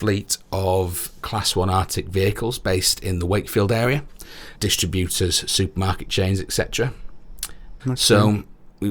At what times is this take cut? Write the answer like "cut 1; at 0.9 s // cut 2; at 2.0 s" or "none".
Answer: cut 1; at 4.5 s // cut 2; at 7.8 s